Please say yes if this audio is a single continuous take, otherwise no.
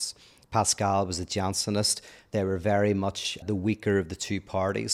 no